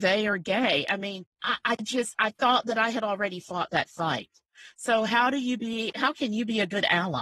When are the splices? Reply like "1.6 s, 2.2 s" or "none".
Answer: 1.3 s, 5.9 s